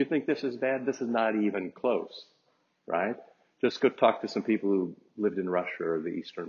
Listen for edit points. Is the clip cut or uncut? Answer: uncut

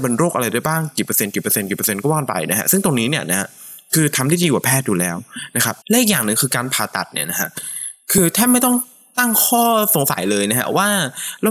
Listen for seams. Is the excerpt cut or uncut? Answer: cut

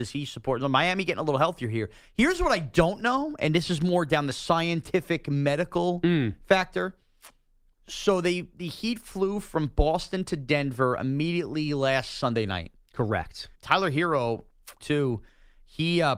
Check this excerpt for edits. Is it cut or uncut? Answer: cut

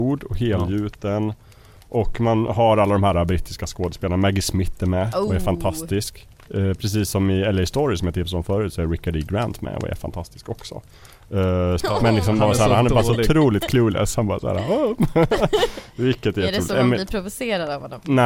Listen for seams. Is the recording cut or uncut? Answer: cut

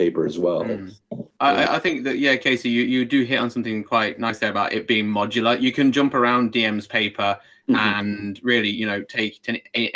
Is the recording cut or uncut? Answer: uncut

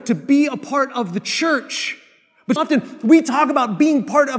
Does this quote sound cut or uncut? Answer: cut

